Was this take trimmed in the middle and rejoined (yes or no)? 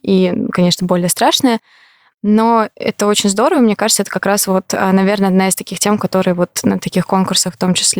no